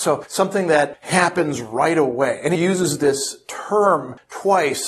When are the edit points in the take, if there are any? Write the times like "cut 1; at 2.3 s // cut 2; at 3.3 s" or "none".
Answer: cut 1; at 2.5 s